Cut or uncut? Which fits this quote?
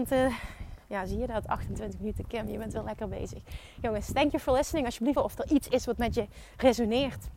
cut